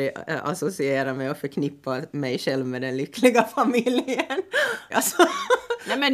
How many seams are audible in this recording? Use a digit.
1